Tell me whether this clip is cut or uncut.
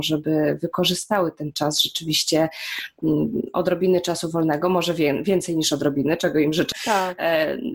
uncut